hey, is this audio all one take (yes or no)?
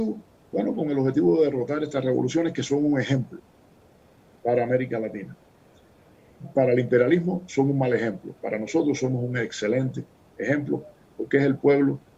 yes